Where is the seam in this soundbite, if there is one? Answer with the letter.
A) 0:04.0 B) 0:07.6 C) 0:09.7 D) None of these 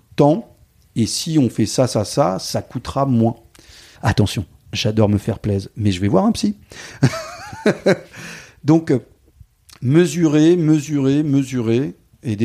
A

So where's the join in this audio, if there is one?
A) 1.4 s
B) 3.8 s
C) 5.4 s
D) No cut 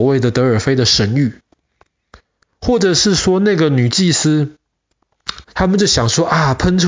C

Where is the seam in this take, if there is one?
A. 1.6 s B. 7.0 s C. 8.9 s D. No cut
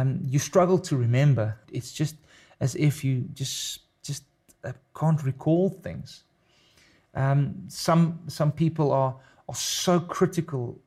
A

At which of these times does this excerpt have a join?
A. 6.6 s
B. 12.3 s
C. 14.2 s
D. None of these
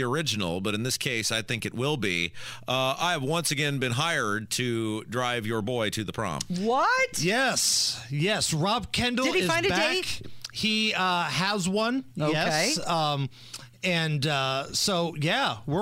D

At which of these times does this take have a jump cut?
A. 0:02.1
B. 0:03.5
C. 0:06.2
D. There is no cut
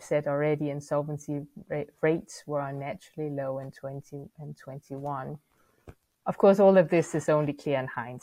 C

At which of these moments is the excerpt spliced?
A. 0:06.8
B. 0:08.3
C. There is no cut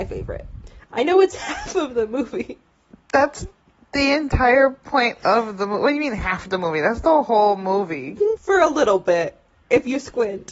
B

